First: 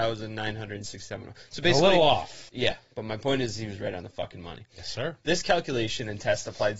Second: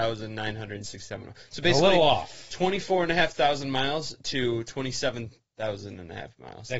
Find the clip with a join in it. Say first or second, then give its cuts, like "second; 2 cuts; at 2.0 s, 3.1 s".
first; 1 cut; at 2.5 s